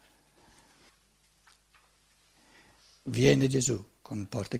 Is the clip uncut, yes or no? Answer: yes